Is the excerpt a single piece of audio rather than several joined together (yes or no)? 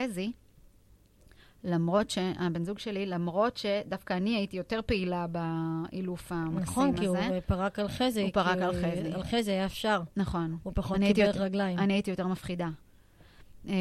yes